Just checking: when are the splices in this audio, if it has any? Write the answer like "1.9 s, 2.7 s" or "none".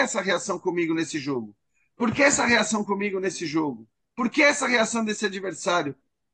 4.0 s